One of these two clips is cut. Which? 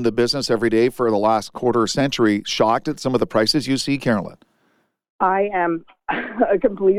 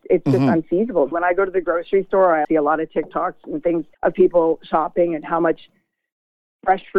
second; 3 cuts; at 1.1 s, 2.4 s, 3.9 s

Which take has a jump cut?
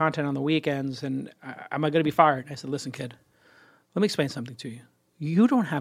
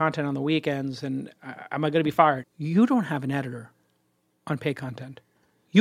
second; 1 cut; at 2.4 s

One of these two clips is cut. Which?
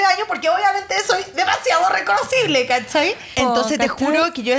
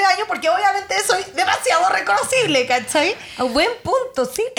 first; 1 cut; at 3.3 s

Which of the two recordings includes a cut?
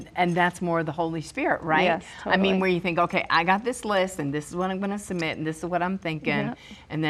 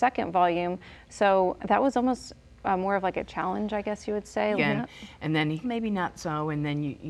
second; 3 cuts; at 1.6 s, 4.6 s, 5.6 s

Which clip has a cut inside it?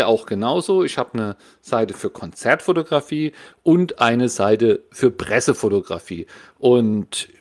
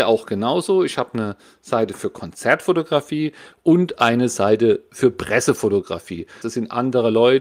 second; 1 cut; at 6.4 s

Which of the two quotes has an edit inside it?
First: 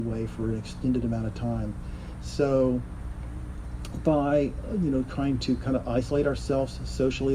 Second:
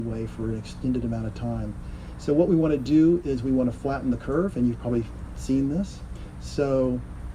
first; 1 cut; at 2.2 s

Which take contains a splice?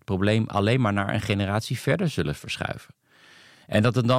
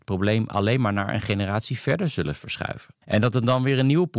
second; 1 cut; at 3.0 s

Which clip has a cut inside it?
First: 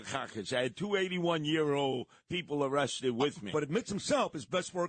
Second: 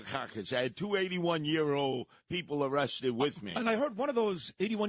first; 1 cut; at 3.5 s

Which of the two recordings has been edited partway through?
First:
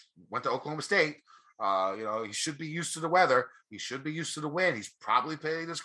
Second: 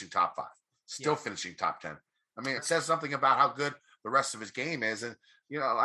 second; 1 cut; at 2.6 s

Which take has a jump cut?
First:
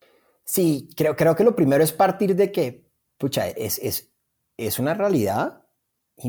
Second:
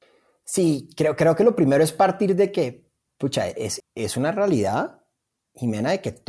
second; 1 cut; at 3.8 s

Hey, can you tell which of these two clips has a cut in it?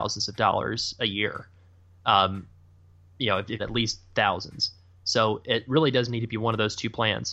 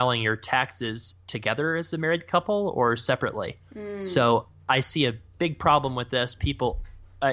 first; 1 cut; at 3.6 s

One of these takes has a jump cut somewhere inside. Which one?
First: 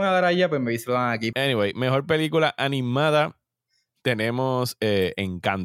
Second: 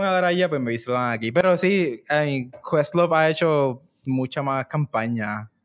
first; 1 cut; at 1.3 s

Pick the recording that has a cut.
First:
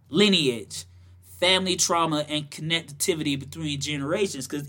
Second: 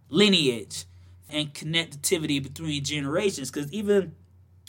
second; 1 cut; at 1.3 s

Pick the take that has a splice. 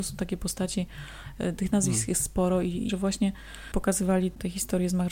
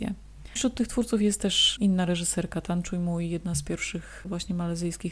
first; 1 cut; at 2.9 s

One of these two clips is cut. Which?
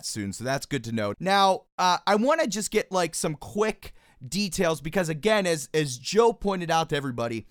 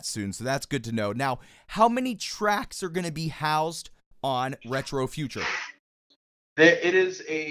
first; 1 cut; at 1.1 s

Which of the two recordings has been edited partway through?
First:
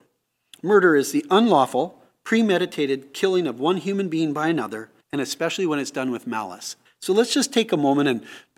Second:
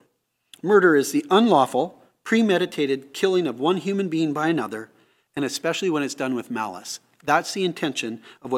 first; 2 cuts; at 5.0 s, 6.8 s

